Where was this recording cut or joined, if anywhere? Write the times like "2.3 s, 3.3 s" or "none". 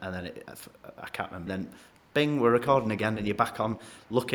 1.5 s